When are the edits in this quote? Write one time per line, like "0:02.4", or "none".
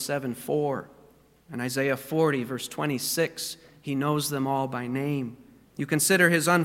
0:05.7